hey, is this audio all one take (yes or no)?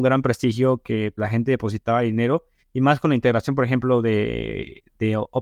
no